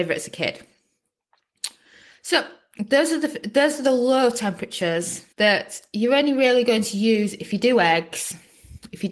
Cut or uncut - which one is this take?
cut